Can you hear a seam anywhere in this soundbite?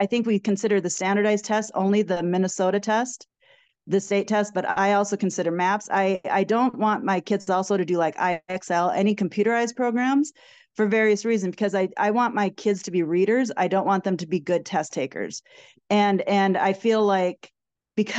no; 0 cuts

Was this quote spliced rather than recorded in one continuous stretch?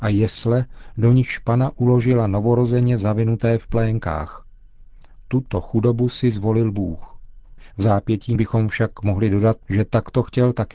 yes; 1 cut; at 7.7 s

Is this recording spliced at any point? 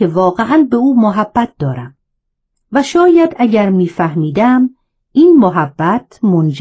yes; 1 cut; at 2.6 s

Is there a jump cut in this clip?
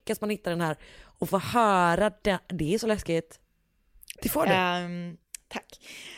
yes; 1 cut; at 4.1 s

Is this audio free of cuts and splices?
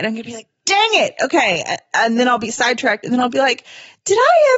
yes; 0 cuts

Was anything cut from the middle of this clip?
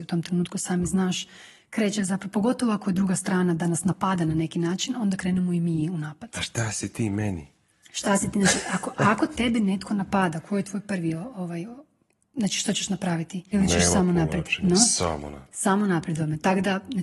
yes; 1 cut; at 13.5 s

